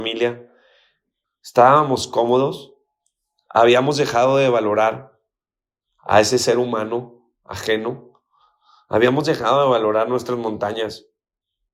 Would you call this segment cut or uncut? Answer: cut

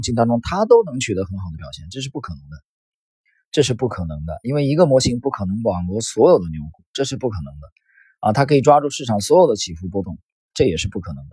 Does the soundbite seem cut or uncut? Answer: uncut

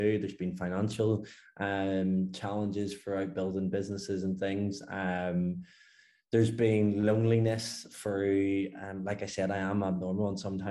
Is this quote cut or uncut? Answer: uncut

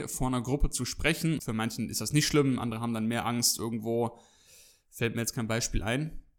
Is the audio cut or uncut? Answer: cut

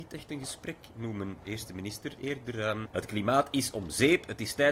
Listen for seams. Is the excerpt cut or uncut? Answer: cut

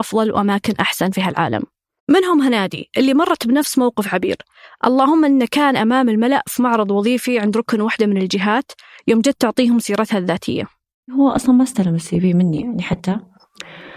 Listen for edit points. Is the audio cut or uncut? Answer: uncut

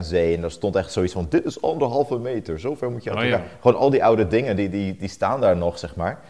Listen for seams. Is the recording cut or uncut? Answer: uncut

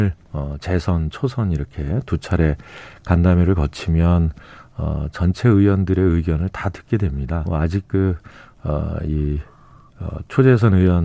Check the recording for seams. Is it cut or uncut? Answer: cut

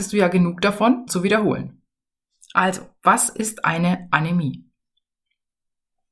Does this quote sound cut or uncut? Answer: cut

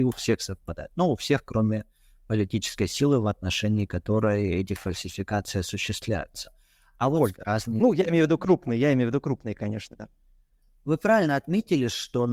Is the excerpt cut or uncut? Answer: cut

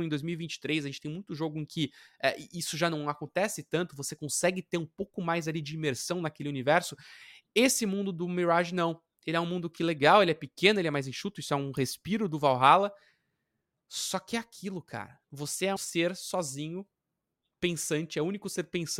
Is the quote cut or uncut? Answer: cut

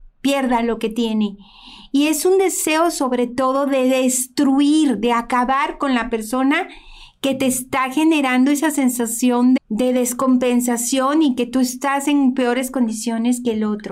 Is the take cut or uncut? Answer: cut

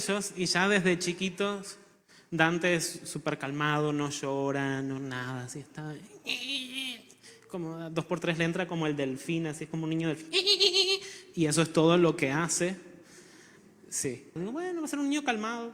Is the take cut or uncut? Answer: cut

